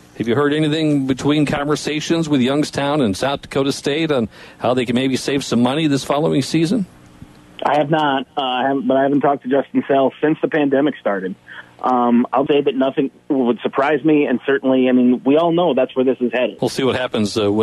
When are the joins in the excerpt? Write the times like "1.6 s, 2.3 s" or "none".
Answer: 12.5 s, 16.6 s